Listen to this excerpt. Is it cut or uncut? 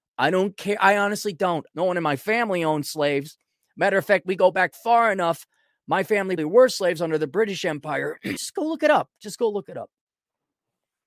cut